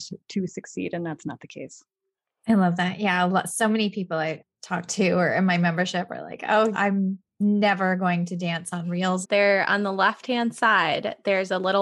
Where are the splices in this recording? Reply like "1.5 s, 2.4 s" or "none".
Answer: 6.7 s, 9.2 s